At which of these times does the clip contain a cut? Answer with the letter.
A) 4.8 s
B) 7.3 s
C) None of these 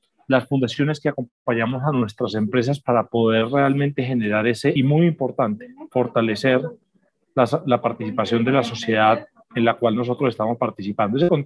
A